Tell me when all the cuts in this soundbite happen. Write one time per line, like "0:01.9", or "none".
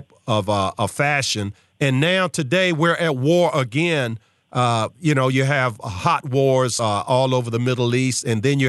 none